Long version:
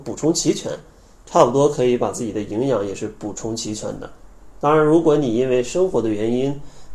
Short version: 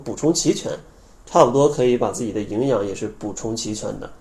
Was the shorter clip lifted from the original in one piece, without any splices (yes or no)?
yes